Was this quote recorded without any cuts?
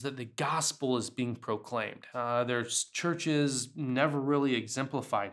no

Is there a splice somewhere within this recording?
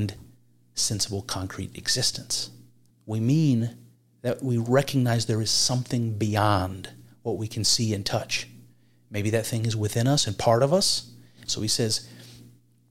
yes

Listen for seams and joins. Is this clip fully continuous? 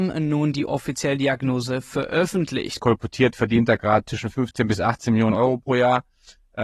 no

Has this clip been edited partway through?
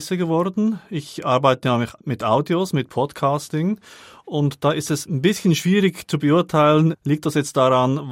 no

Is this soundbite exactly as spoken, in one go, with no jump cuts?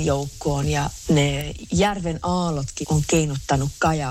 no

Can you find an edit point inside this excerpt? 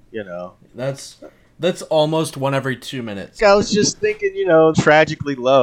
yes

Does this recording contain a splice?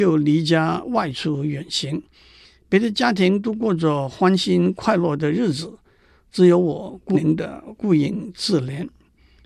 yes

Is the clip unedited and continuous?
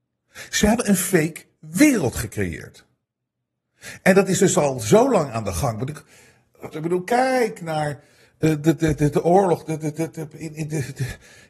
no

